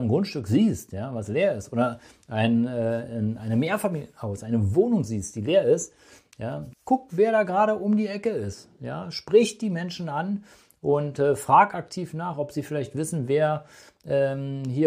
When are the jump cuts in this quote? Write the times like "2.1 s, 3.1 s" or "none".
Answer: 6.7 s